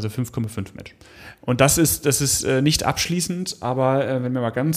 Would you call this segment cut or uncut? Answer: cut